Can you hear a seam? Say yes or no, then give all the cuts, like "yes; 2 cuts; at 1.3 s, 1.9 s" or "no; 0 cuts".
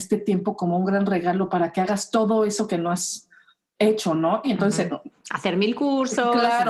yes; 1 cut; at 4.4 s